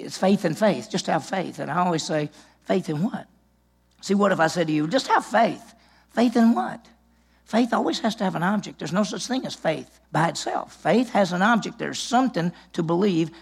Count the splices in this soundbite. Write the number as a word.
one